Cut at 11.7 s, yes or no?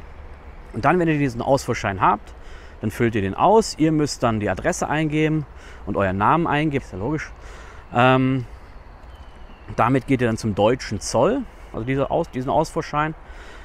yes